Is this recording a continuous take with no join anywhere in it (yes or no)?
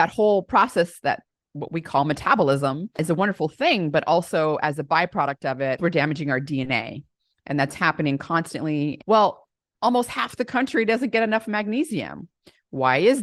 no